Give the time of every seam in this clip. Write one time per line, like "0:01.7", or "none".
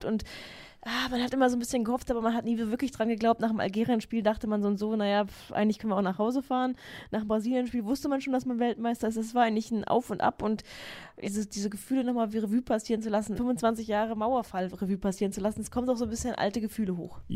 0:11.2
0:13.4